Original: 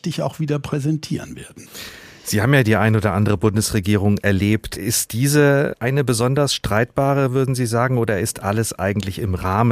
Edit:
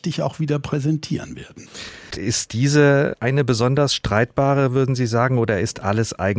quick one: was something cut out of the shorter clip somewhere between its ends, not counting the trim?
yes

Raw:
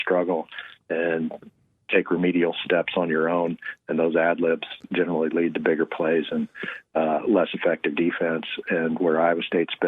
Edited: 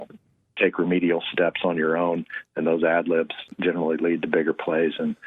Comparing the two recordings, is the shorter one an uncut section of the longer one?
yes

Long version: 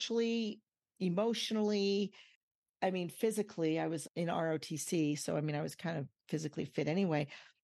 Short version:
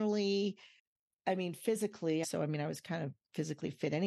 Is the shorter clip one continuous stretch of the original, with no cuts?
no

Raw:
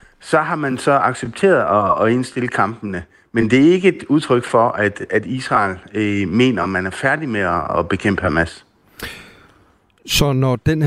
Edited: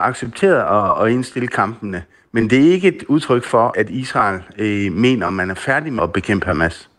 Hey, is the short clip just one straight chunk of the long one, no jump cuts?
no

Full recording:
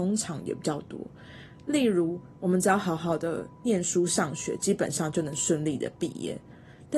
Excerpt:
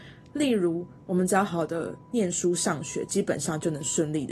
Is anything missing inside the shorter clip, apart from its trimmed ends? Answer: yes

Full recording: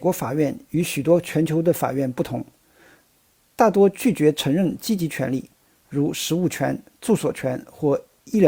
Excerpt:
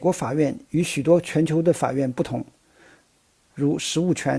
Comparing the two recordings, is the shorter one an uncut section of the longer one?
no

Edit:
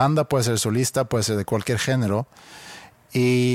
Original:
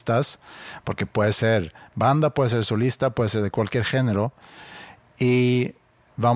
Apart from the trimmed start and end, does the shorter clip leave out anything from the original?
no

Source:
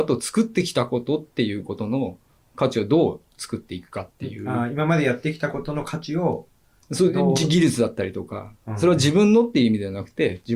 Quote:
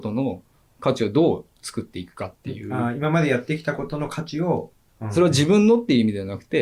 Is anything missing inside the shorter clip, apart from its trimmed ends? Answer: yes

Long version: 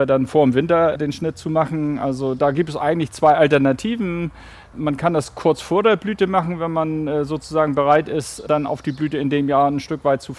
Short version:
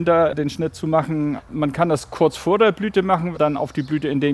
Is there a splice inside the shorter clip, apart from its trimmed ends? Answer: yes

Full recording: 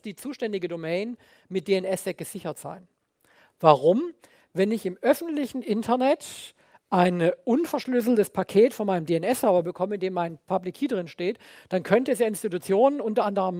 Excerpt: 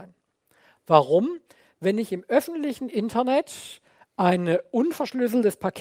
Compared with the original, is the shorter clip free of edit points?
yes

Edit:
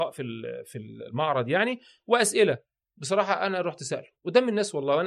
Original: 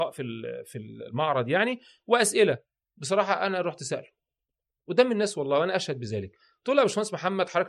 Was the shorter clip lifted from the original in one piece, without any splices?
no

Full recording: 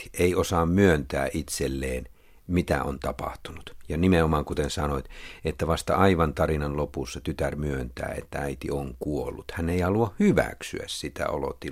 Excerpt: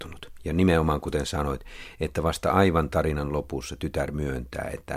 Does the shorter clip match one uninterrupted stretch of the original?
yes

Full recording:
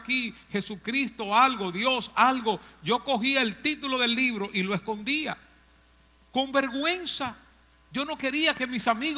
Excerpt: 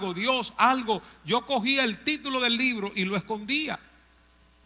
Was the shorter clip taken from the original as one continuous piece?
yes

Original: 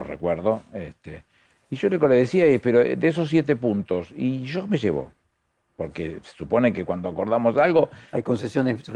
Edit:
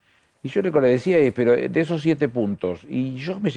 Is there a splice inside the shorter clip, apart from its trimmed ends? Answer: no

